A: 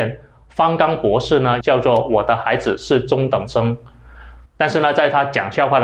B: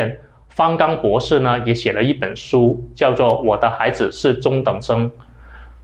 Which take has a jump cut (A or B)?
A